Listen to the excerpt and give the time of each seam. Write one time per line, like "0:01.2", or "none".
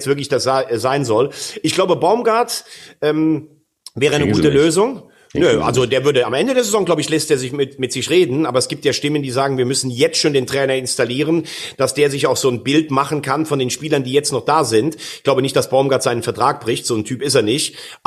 none